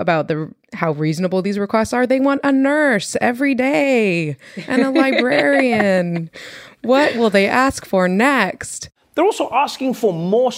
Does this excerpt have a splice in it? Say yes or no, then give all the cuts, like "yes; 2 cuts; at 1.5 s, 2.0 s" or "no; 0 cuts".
no; 0 cuts